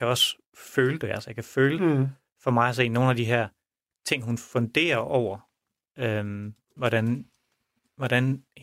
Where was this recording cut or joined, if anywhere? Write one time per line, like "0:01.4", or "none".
0:06.8